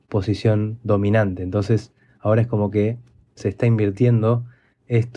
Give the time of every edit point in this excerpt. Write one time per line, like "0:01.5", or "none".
none